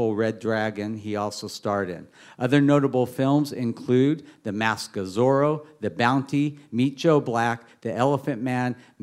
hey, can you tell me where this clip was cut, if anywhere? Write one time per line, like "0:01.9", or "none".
none